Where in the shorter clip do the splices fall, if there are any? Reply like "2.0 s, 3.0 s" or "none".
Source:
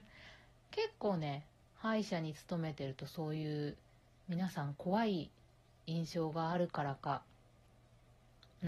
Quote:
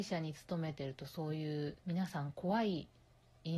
1.8 s